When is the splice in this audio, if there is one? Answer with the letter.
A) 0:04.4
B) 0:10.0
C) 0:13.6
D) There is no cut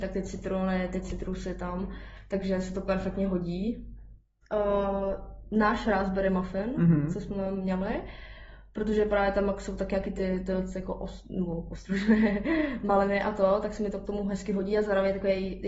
A